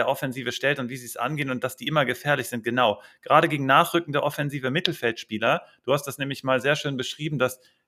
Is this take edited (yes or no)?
no